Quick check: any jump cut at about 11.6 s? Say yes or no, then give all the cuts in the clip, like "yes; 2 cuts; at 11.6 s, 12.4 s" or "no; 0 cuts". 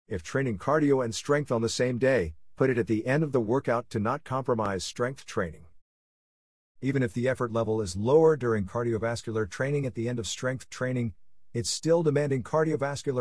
no; 1 cut; at 6.7 s